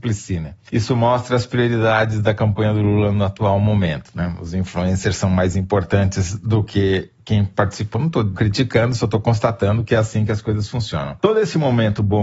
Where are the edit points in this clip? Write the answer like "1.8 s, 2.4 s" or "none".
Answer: none